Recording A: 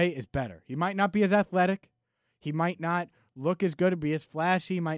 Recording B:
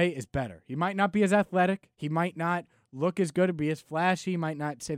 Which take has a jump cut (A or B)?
B